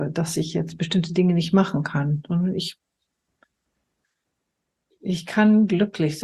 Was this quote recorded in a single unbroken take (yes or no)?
yes